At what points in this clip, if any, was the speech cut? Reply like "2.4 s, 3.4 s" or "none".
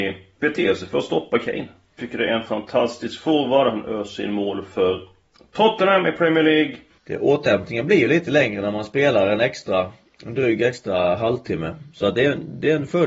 2.0 s, 7.0 s